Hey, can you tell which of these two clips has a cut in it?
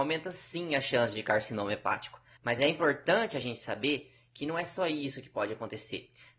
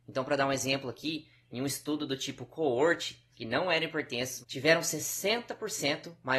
second; 2 cuts; at 3.3 s, 4.4 s

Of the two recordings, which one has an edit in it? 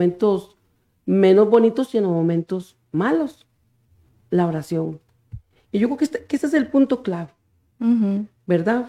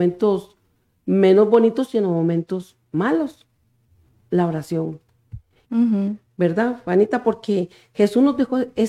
second; 1 cut; at 5.6 s

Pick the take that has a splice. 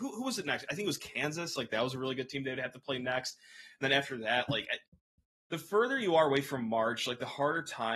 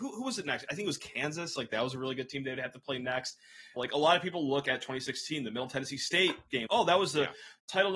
second; 2 cuts; at 3.8 s, 6.7 s

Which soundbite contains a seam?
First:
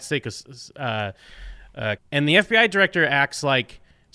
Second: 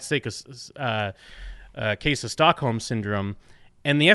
first; 1 cut; at 2.0 s

